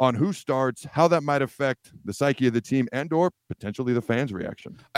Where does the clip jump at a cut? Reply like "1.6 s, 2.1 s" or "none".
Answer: 3.4 s